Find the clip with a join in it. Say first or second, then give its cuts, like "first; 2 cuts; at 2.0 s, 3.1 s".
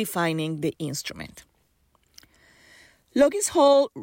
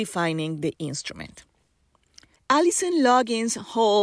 second; 1 cut; at 2.4 s